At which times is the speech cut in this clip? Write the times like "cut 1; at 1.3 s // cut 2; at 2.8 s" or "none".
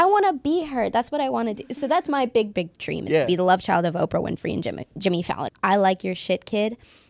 cut 1; at 2.5 s // cut 2; at 5.5 s